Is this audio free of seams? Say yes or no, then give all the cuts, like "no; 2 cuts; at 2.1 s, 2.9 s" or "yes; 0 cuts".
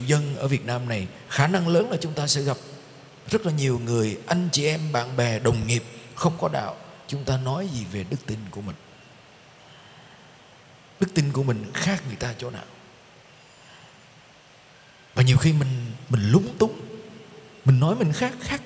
yes; 0 cuts